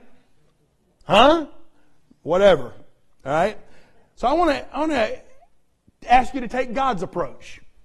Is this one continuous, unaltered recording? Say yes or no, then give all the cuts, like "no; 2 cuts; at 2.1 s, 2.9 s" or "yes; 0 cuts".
no; 1 cut; at 4.2 s